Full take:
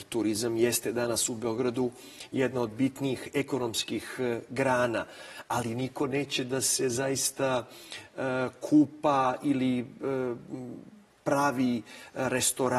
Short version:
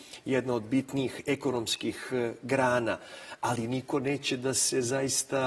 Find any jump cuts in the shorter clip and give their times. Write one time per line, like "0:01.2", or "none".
none